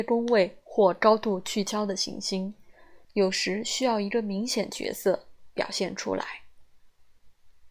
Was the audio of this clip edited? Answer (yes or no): yes